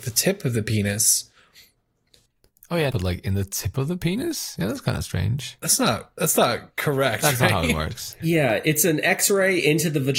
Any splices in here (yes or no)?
yes